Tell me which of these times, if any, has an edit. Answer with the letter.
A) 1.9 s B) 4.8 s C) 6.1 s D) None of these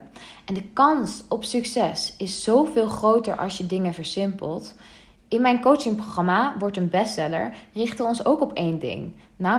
D